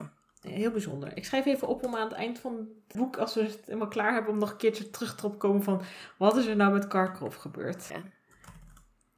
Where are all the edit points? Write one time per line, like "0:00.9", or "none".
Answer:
0:02.9
0:07.9